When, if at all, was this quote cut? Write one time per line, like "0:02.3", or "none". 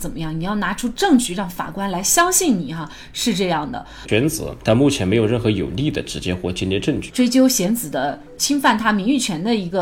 0:04.0
0:07.1